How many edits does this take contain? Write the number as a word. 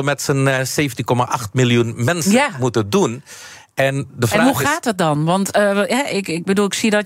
zero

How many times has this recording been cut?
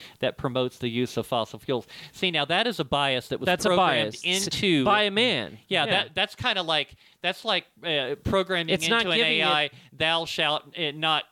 zero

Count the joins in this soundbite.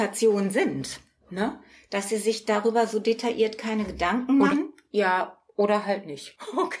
one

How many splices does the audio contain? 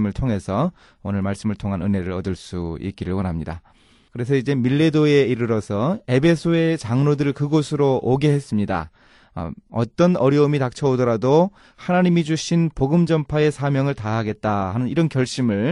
two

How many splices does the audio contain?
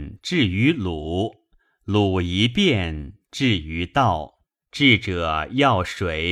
one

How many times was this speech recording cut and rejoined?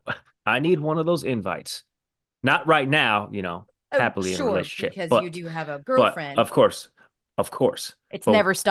zero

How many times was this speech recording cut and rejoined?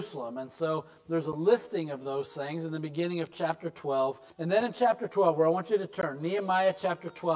one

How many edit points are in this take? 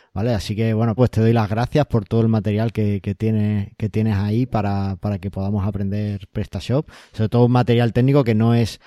one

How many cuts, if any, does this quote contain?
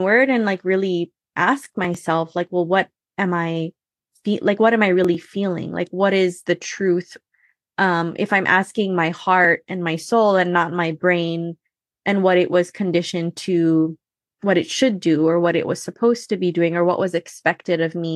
one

